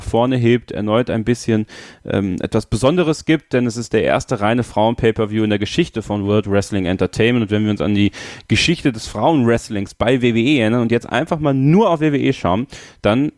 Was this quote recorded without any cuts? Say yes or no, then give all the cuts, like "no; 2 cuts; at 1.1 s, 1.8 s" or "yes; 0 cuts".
yes; 0 cuts